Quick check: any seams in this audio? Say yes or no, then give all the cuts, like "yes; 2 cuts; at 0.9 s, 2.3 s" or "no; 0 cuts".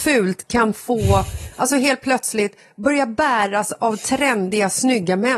no; 0 cuts